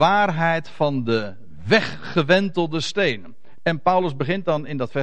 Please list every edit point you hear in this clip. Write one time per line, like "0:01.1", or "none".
0:03.6